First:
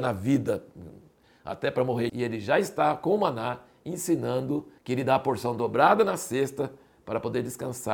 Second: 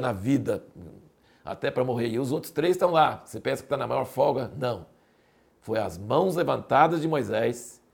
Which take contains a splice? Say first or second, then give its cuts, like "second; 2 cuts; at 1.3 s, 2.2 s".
first; 2 cuts; at 2.1 s, 4.8 s